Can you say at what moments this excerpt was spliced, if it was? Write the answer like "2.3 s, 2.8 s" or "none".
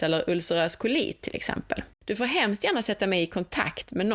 1.9 s